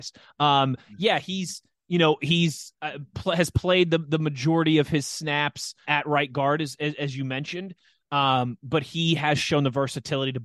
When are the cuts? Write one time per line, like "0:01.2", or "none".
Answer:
0:05.8